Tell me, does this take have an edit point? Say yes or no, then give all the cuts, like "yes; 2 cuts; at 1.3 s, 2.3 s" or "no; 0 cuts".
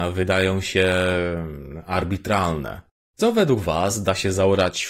yes; 1 cut; at 3.0 s